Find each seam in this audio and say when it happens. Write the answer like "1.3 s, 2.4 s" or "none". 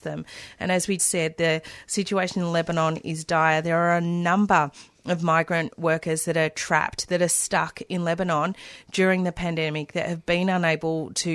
1.0 s